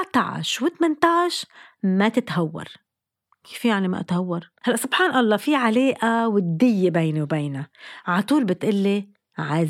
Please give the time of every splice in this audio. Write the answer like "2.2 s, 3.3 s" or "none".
4.6 s